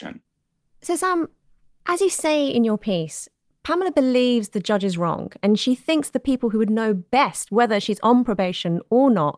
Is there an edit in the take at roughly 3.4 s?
no; 0 cuts

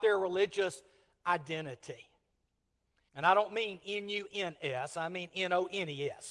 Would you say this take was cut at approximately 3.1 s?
yes; 1 cut; at 3.1 s

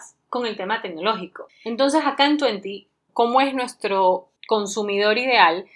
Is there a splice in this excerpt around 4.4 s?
yes; 3 cuts; at 1.5 s, 3.1 s, 4.4 s

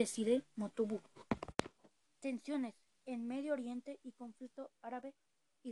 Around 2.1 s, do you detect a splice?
no; 0 cuts

